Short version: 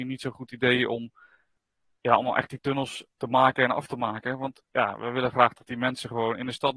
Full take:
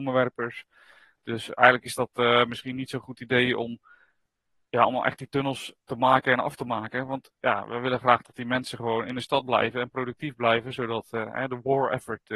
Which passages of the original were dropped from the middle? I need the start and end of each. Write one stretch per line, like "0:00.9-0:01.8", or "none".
none